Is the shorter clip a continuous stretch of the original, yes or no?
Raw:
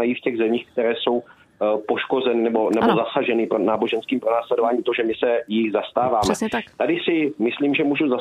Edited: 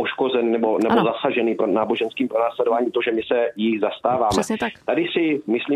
yes